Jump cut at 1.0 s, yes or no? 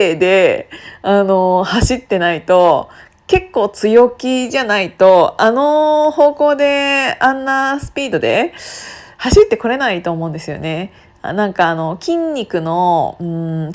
no